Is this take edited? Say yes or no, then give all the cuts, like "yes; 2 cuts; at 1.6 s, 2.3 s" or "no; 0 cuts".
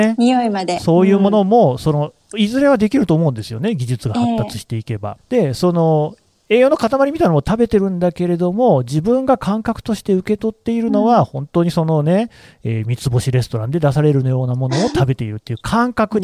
yes; 1 cut; at 5.2 s